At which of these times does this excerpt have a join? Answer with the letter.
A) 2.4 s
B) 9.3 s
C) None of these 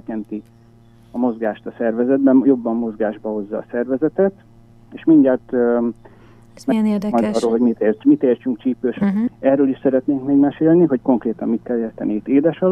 B